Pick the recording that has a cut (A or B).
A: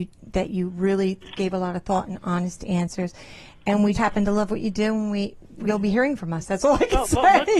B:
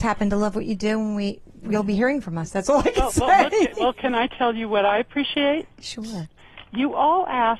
A